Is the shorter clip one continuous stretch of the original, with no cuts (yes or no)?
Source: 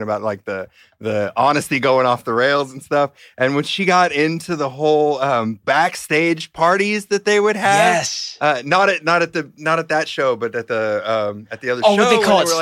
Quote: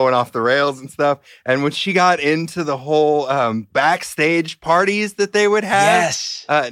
yes